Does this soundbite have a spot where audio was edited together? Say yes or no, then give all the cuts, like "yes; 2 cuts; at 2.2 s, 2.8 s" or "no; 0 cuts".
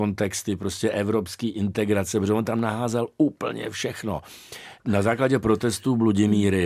yes; 1 cut; at 4.8 s